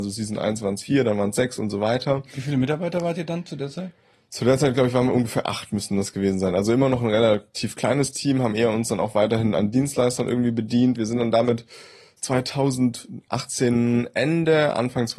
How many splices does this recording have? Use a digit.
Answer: 1